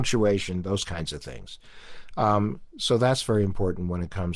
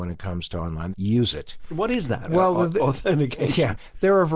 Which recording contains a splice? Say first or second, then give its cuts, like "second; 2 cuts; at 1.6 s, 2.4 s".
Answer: second; 2 cuts; at 0.9 s, 2.3 s